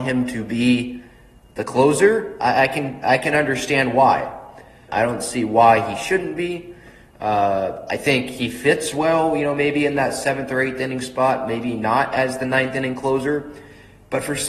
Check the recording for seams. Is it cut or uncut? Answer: cut